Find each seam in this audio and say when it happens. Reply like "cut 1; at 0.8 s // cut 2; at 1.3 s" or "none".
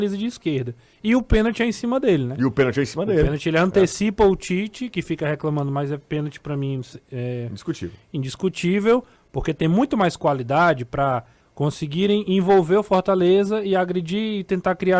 cut 1; at 9.2 s // cut 2; at 11.4 s